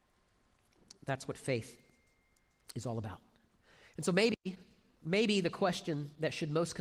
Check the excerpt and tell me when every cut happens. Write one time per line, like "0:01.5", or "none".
none

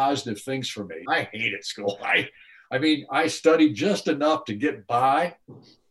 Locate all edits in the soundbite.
0:01.1

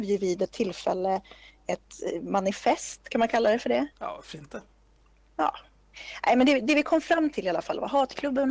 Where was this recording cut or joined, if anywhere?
0:03.9

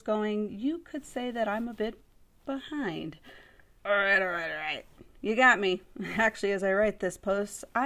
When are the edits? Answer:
0:03.8

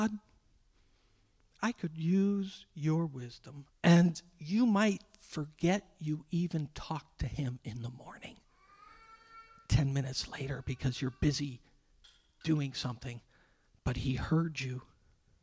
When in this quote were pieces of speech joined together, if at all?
0:03.7

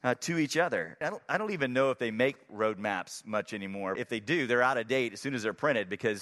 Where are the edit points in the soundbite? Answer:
0:01.0
0:04.0

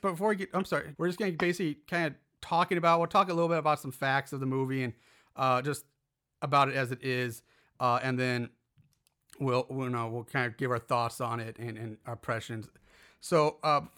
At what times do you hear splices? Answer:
0:00.9
0:11.6

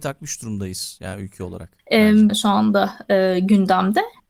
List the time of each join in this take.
0:02.3

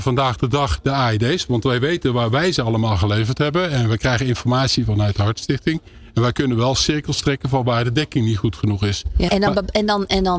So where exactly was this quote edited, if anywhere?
0:09.3

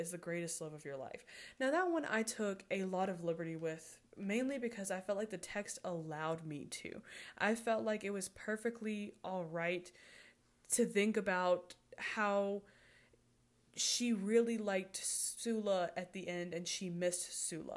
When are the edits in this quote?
none

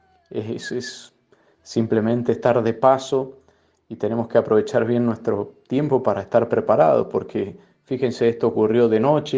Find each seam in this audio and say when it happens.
none

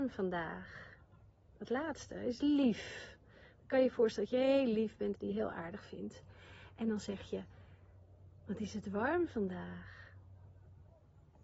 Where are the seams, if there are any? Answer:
0:05.1

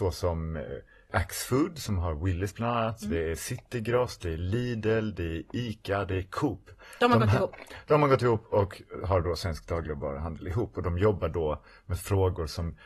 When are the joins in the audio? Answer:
none

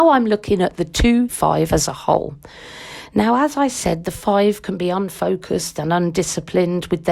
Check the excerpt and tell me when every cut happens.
0:01.3

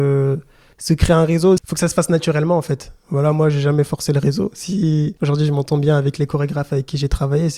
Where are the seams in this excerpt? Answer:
none

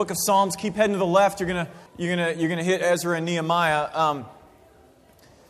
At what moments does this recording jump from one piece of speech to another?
0:01.9

